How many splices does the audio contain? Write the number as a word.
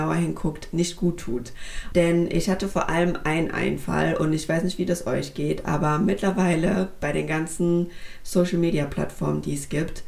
one